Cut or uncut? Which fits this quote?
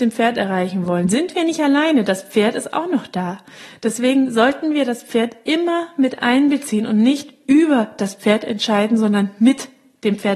uncut